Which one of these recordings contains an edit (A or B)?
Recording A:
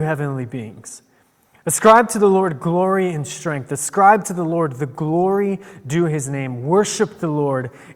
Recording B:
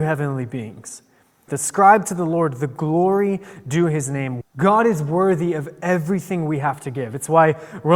B